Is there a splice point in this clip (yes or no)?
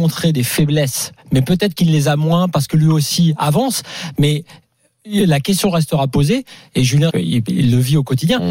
yes